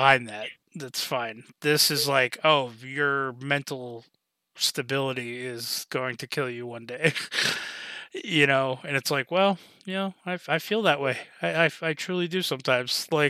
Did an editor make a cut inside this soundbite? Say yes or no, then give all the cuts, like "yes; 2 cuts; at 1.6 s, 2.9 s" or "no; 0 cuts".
no; 0 cuts